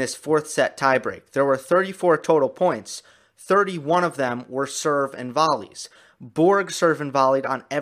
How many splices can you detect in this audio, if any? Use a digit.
0